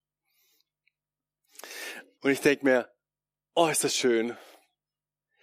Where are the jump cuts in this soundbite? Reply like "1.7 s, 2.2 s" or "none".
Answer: 2.2 s